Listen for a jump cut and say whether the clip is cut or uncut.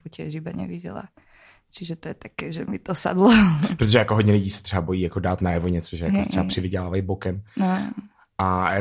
uncut